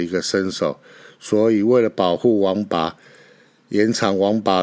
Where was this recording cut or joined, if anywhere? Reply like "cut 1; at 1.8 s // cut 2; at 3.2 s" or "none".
none